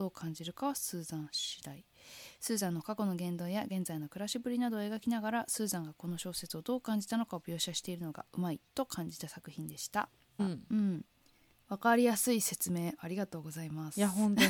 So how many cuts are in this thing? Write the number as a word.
one